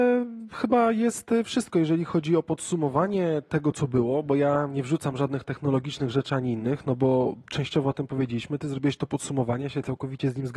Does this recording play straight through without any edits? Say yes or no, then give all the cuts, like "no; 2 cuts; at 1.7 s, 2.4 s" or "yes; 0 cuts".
yes; 0 cuts